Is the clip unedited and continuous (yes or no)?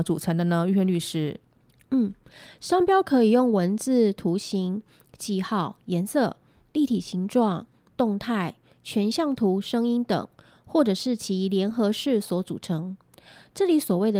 yes